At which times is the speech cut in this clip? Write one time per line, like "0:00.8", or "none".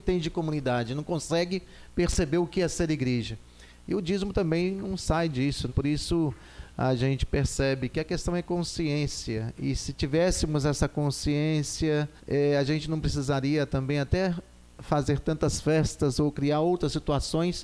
0:05.7
0:12.2